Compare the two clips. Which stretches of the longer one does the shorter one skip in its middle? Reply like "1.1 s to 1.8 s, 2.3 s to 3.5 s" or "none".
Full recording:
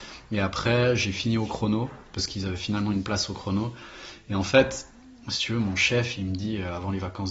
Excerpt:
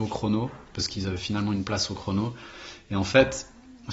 none